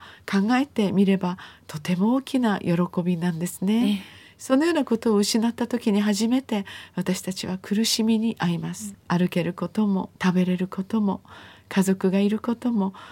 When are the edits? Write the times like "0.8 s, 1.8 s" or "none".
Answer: 8.9 s, 10.2 s